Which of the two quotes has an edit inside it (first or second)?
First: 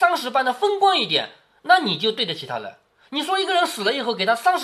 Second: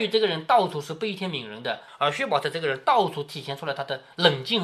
second